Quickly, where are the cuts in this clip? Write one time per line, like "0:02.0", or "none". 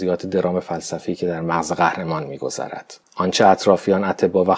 0:03.1